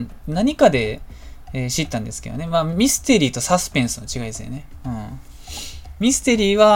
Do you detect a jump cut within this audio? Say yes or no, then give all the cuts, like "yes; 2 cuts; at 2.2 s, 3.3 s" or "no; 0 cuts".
no; 0 cuts